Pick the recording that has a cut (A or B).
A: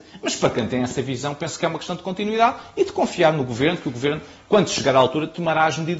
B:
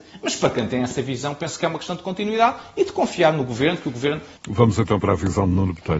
B